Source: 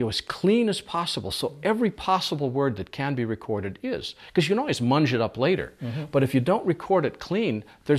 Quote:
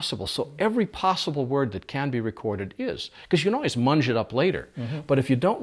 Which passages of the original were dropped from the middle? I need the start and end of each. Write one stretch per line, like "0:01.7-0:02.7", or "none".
none